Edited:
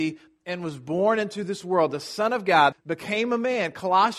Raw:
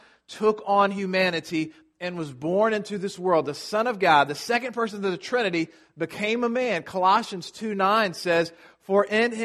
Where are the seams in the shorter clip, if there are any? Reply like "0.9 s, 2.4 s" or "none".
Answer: 2.7 s